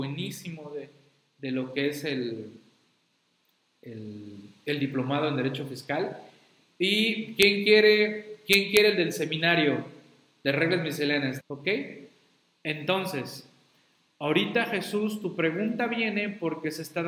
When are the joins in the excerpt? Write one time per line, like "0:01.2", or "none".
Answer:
0:11.4